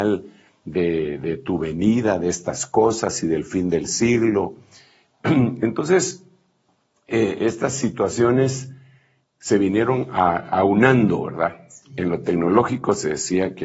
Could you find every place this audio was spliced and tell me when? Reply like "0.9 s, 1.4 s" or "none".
none